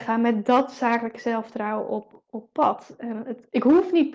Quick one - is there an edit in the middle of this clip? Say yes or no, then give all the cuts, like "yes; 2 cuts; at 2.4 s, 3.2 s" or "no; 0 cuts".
no; 0 cuts